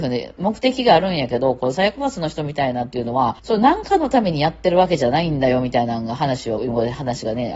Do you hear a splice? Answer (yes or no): yes